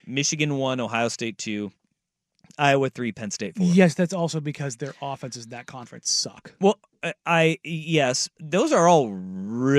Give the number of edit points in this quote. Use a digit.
1